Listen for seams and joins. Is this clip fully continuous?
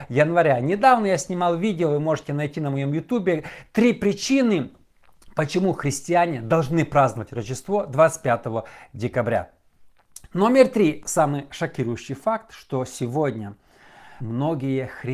no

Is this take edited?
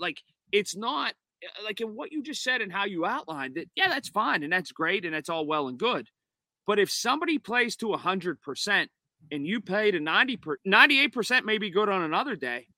yes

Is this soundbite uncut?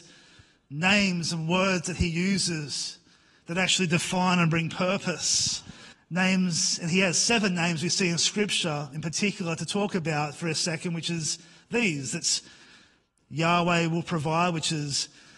no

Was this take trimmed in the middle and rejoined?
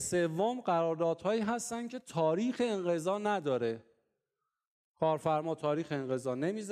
no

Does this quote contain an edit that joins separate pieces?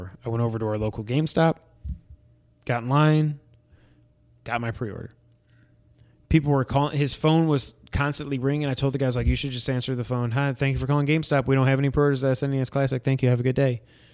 no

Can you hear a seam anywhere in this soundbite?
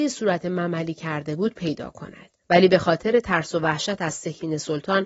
yes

